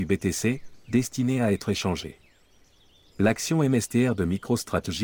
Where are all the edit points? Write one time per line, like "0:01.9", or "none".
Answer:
0:03.1